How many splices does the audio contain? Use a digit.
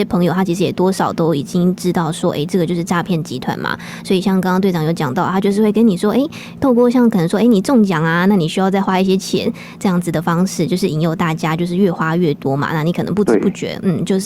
0